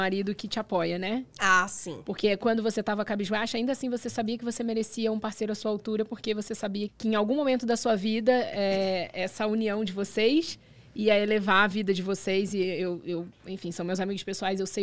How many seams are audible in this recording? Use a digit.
1